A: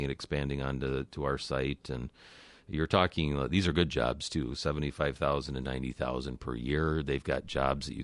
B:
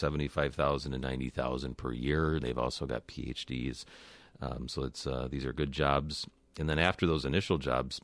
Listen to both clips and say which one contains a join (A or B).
B